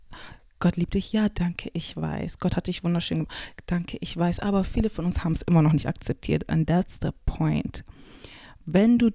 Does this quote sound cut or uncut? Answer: uncut